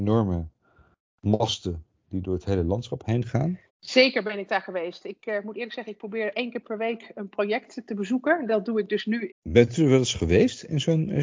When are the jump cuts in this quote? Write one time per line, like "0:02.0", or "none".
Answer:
0:03.7
0:09.3

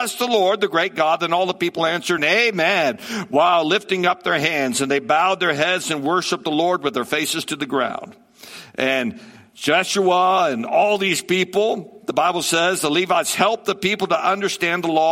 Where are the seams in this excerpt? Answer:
0:02.2

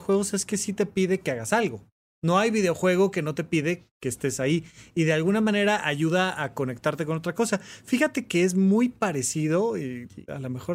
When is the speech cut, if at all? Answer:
none

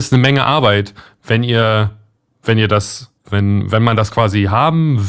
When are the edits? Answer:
0:03.2

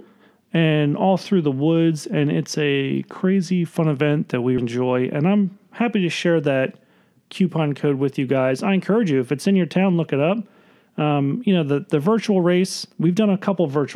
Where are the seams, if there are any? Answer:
0:04.6

